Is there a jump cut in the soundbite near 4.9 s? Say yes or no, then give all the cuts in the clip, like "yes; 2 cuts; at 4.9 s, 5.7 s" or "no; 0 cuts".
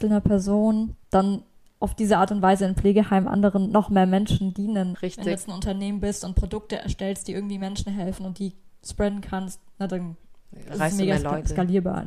yes; 1 cut; at 4.9 s